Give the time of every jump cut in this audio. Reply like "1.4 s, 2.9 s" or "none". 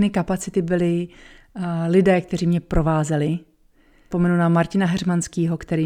none